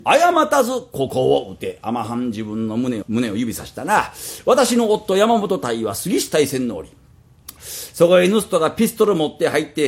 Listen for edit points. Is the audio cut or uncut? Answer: cut